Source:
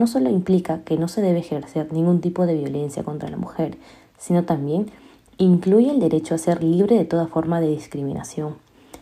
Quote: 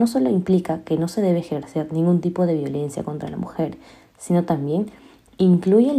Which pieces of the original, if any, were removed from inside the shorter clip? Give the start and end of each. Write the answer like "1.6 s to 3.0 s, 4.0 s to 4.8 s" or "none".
none